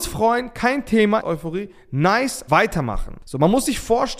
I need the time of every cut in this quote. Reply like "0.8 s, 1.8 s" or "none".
1.2 s, 2.5 s